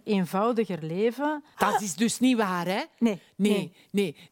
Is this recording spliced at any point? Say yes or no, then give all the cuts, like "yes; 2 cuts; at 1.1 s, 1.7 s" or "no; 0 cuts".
yes; 1 cut; at 1.5 s